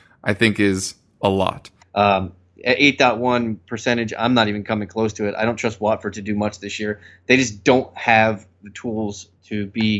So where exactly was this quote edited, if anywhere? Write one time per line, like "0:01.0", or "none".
0:01.8